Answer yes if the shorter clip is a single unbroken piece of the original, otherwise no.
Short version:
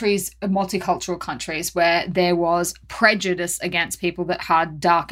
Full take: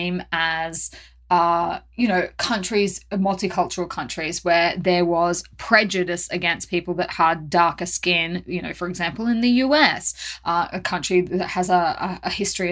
yes